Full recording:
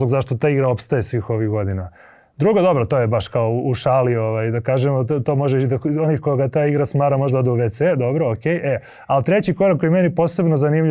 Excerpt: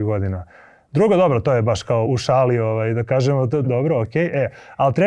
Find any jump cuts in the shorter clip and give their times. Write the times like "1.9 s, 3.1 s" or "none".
2.1 s, 3.6 s